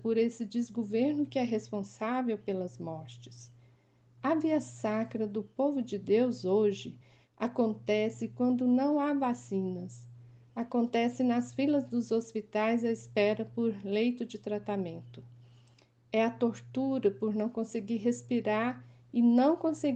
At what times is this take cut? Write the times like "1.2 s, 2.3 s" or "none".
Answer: none